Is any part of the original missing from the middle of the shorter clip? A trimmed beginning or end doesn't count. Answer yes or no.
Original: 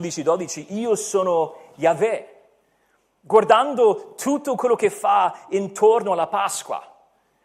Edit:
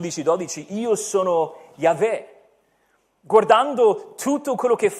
no